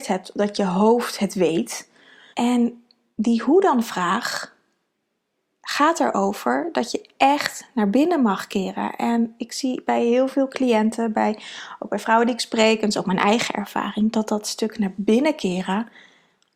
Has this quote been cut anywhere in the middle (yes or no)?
yes